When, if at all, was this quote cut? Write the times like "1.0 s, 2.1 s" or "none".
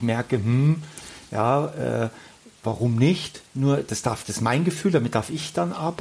3.5 s